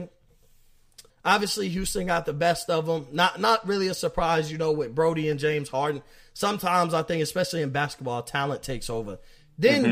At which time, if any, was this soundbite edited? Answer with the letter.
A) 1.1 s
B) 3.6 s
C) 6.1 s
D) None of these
A